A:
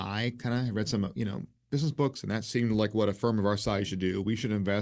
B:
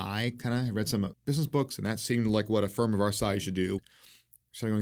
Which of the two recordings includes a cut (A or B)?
B